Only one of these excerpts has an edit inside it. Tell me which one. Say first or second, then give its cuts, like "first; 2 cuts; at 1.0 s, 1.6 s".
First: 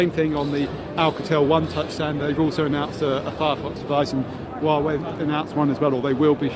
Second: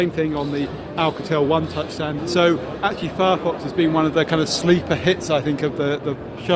second; 1 cut; at 2.2 s